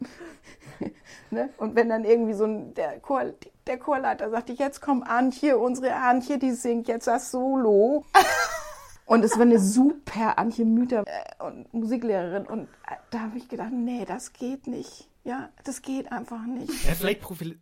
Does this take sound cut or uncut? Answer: cut